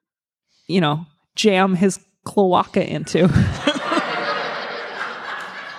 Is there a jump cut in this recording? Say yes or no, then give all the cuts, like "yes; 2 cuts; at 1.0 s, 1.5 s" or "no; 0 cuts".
no; 0 cuts